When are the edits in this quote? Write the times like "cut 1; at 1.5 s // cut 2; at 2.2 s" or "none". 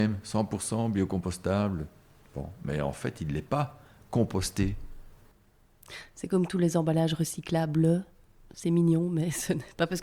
none

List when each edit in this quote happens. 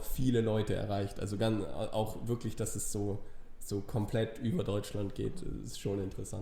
none

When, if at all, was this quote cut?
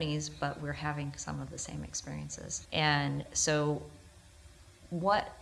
cut 1; at 2.7 s

